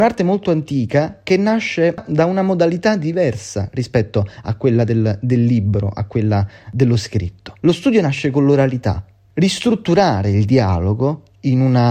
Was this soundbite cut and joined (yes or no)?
yes